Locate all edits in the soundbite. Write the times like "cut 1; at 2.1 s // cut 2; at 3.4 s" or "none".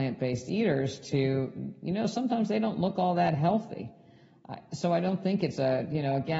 none

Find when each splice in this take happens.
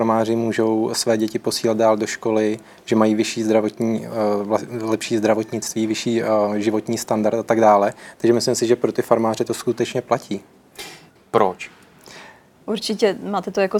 cut 1; at 11.2 s // cut 2; at 12.6 s

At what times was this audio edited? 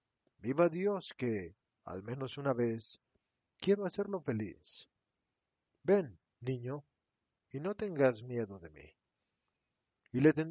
none

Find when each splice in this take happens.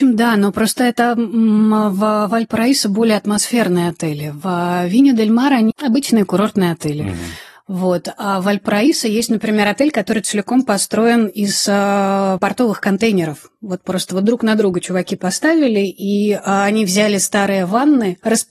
cut 1; at 5.7 s

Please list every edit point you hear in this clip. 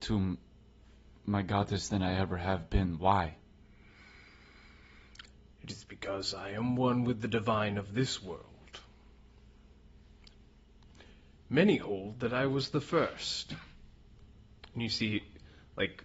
none

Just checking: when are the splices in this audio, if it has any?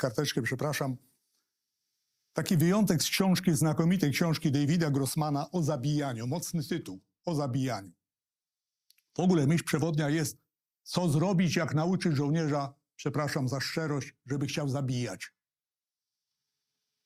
none

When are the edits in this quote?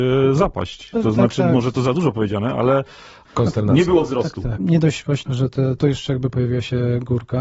cut 1; at 4.5 s // cut 2; at 5.8 s

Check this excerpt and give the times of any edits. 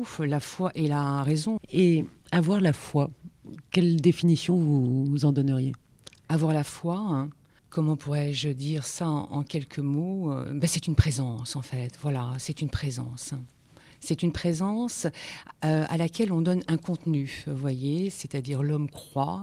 cut 1; at 1.6 s

